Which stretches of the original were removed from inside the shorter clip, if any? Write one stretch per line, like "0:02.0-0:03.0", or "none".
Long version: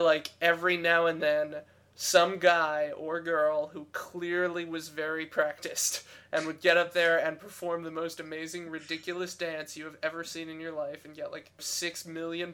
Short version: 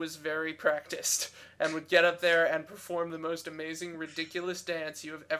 none